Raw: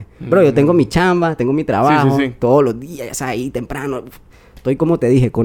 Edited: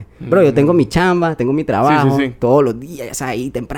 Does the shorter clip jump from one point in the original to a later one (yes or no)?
no